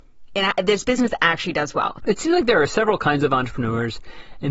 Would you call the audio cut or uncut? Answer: cut